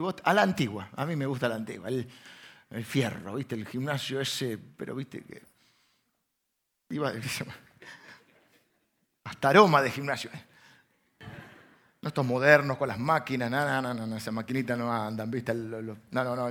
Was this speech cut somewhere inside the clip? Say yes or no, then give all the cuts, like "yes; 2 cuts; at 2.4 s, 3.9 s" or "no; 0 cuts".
no; 0 cuts